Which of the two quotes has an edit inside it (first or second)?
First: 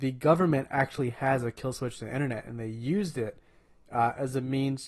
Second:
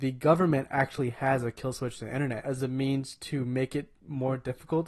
second